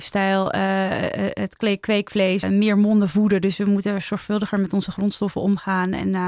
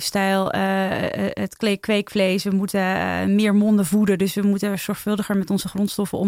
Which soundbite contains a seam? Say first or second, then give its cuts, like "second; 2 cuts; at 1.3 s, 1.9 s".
first; 1 cut; at 2.4 s